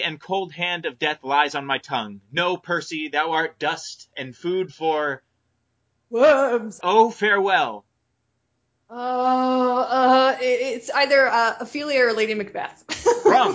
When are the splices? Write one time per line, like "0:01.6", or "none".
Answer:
0:06.8

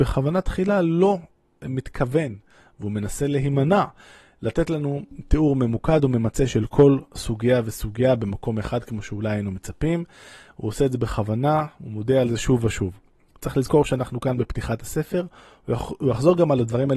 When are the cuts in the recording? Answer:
none

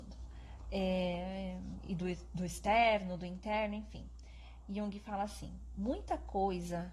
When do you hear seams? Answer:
none

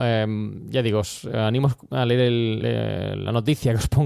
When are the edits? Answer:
0:02.6

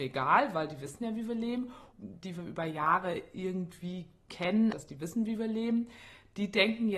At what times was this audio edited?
0:01.9
0:04.7

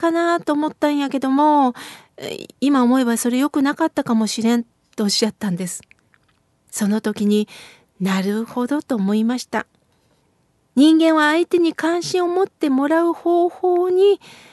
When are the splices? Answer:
none

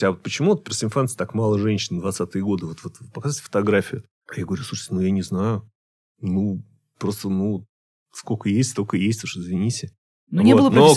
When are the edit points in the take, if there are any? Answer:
none

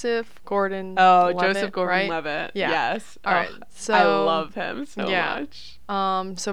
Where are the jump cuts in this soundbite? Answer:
none

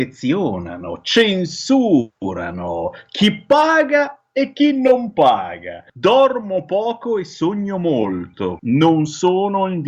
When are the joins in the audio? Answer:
0:05.9
0:08.6

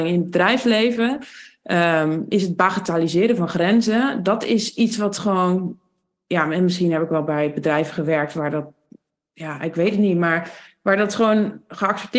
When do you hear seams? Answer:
none

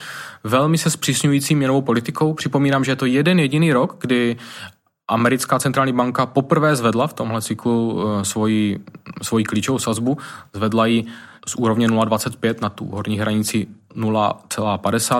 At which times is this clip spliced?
none

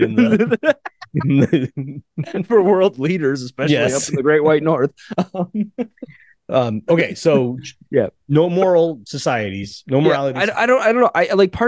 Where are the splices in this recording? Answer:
none

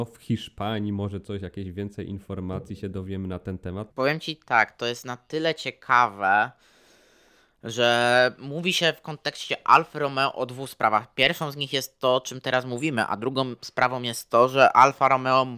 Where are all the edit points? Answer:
0:03.9

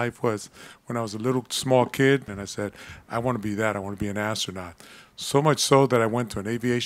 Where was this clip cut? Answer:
0:02.3

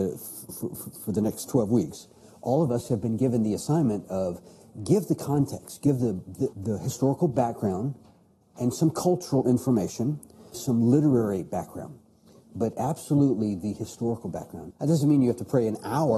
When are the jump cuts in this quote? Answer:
0:06.5
0:10.5
0:14.7

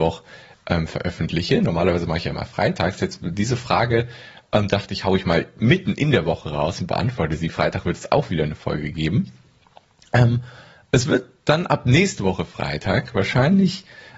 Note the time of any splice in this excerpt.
none

